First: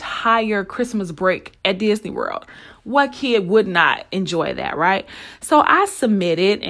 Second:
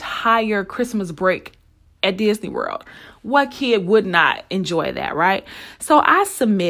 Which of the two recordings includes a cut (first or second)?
first